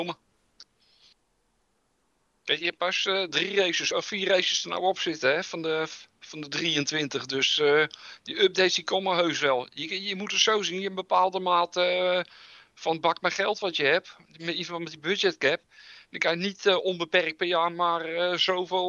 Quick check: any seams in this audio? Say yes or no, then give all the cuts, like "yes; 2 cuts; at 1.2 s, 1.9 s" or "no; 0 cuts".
no; 0 cuts